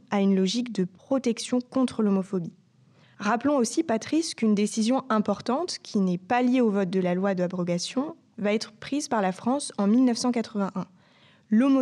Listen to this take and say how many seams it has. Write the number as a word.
zero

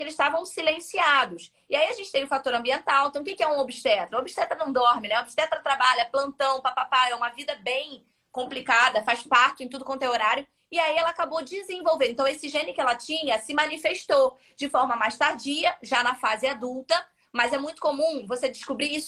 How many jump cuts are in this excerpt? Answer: zero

